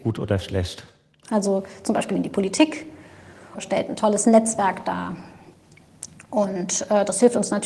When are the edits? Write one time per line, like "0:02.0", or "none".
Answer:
0:01.2
0:03.5